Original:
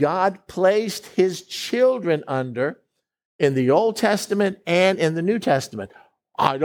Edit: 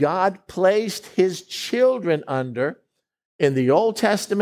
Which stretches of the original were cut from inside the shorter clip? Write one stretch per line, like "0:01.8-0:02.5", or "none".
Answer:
none